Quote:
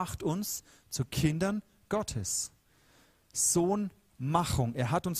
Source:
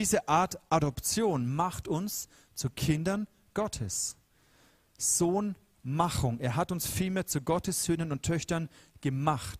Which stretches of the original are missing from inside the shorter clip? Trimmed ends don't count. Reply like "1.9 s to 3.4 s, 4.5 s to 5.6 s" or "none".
none